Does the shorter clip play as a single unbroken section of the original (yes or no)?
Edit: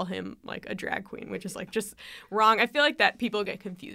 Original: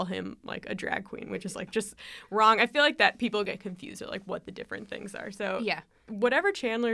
yes